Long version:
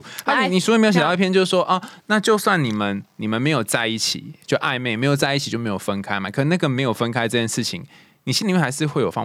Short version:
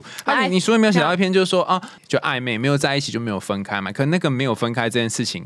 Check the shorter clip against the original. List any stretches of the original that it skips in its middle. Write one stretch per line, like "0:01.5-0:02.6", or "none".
0:02.0-0:04.4